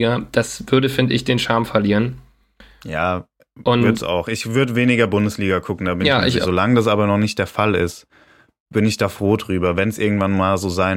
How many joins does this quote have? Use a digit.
1